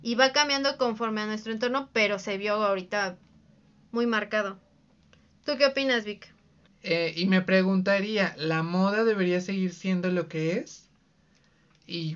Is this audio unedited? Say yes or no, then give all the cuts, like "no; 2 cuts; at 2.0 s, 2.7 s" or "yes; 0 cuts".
no; 1 cut; at 6.7 s